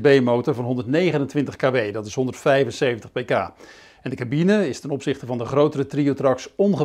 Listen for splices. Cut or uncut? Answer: uncut